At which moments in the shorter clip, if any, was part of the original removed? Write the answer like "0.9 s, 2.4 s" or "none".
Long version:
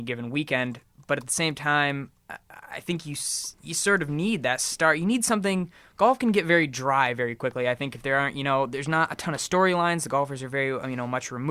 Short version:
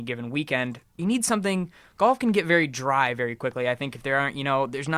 1.0 s